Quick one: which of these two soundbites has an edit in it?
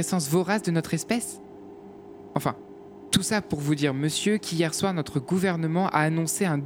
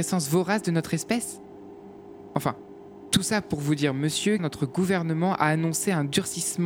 second; 1 cut; at 4.4 s

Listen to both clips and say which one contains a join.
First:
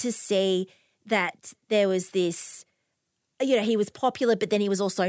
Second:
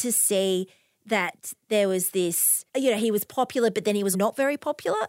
second; 2 cuts; at 2.7 s, 4.1 s

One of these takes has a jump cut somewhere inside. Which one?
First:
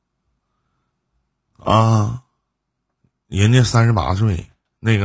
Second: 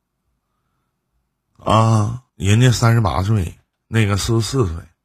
second; 1 cut; at 2.3 s

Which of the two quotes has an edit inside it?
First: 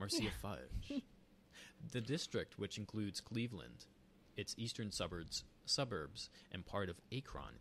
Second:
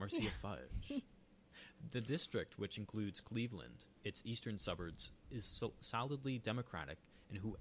second; 2 cuts; at 4.0 s, 5.2 s

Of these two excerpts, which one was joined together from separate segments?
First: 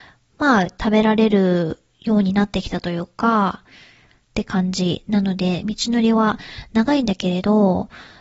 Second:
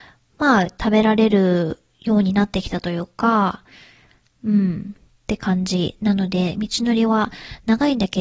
first; 1 cut; at 4.2 s

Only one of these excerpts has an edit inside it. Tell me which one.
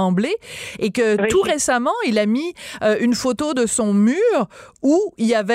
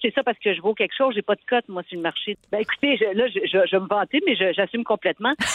second; 1 cut; at 2.3 s

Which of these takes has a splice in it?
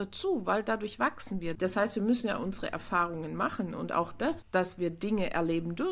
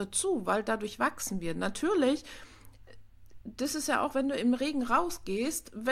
first; 2 cuts; at 1.6 s, 4.4 s

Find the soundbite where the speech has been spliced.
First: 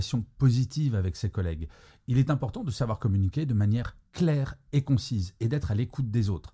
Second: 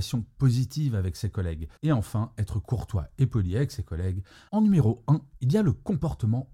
second; 2 cuts; at 1.8 s, 4.5 s

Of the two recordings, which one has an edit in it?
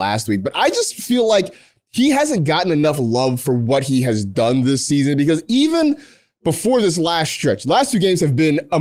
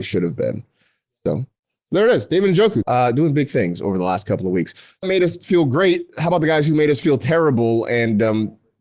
second; 2 cuts; at 2.8 s, 5.0 s

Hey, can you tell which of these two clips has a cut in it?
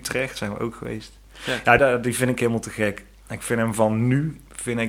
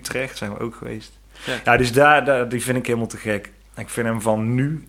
first; 1 cut; at 1.8 s

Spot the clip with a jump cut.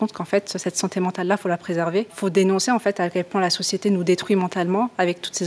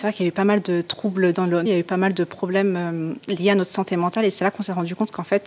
second; 1 cut; at 1.7 s

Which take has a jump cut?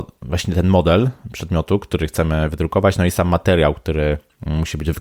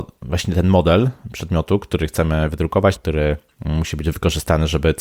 second; 1 cut; at 2.9 s

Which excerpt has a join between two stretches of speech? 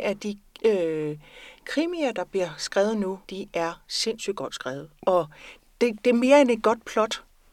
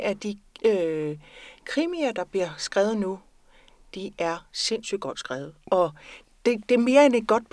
first; 1 cut; at 3.2 s

